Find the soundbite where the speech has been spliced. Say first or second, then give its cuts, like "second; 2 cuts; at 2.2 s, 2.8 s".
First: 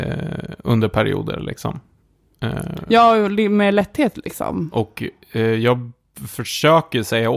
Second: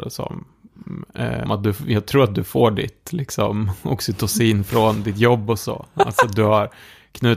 second; 1 cut; at 1.5 s